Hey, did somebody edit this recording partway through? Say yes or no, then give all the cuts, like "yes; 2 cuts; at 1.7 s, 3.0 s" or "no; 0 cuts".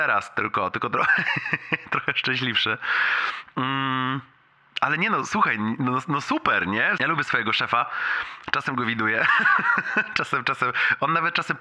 yes; 1 cut; at 7.0 s